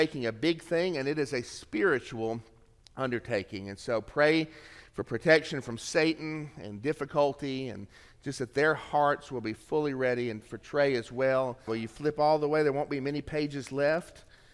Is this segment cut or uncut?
cut